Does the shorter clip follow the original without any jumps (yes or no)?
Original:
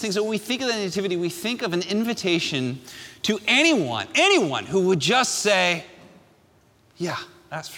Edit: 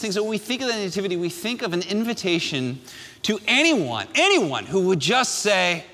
yes